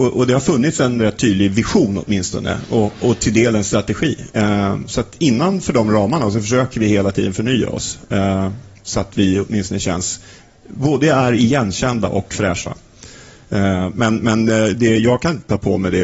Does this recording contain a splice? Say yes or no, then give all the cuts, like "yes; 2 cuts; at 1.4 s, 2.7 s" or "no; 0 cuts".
no; 0 cuts